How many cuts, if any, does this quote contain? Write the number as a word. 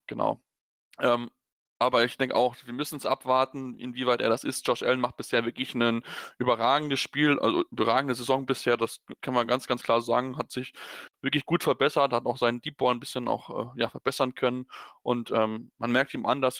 zero